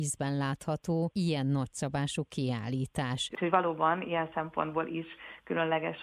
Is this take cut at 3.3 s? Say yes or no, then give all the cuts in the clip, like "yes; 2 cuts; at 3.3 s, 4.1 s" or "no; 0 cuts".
yes; 1 cut; at 3.3 s